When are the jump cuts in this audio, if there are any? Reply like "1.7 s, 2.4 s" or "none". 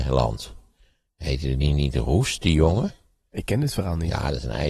none